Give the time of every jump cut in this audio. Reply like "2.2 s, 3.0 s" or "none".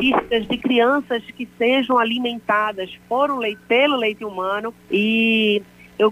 4.9 s